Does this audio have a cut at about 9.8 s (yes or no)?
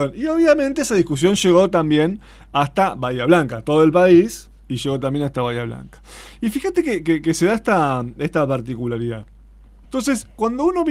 yes